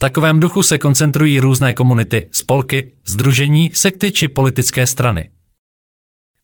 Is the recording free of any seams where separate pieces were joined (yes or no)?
yes